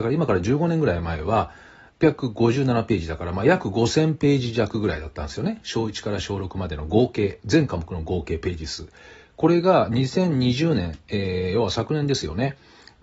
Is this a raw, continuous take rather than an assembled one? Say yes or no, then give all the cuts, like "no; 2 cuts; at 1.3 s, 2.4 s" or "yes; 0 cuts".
no; 1 cut; at 1.9 s